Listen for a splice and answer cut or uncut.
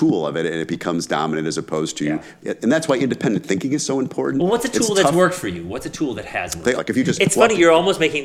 cut